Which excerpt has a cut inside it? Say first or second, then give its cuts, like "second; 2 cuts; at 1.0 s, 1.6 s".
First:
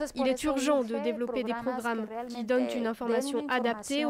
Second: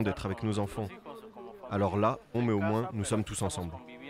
second; 1 cut; at 2.3 s